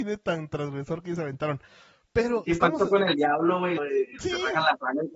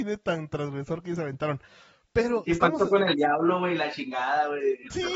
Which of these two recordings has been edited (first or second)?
first